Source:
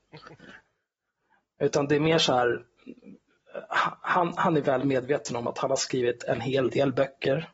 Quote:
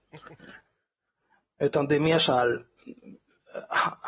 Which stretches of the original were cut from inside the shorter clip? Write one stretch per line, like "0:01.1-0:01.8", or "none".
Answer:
none